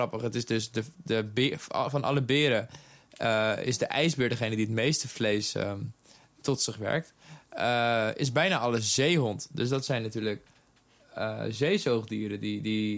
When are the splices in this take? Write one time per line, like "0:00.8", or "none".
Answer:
none